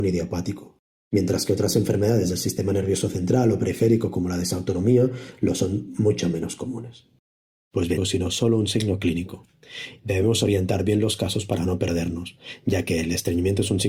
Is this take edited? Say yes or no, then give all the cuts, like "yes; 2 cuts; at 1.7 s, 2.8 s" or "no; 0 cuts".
yes; 2 cuts; at 8.0 s, 10.0 s